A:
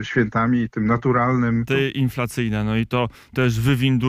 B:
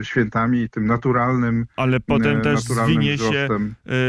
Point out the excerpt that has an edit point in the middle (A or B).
A